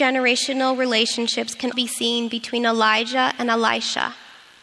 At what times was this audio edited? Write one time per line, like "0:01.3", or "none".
0:01.7